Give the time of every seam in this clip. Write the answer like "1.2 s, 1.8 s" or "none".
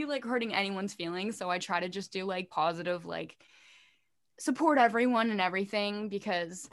none

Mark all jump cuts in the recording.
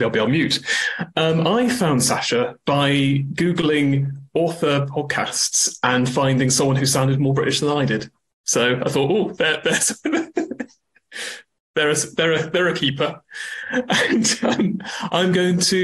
none

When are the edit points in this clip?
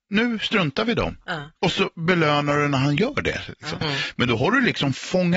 1.6 s, 3.8 s

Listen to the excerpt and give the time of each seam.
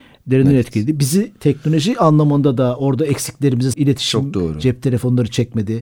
3.7 s

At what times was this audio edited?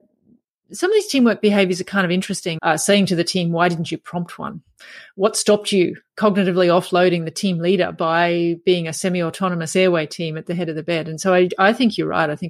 2.6 s

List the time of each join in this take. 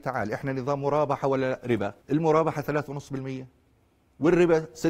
2.0 s

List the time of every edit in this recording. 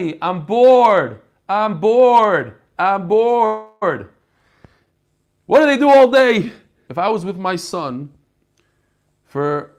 6.9 s

